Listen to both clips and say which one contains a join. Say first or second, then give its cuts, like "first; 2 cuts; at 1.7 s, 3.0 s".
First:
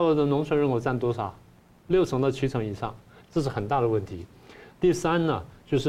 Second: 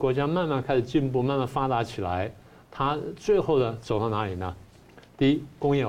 first; 2 cuts; at 3.2 s, 4.7 s